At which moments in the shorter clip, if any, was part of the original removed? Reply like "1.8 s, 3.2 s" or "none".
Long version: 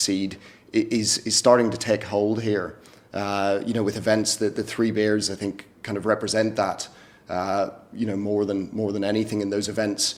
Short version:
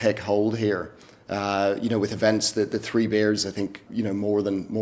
3.9 s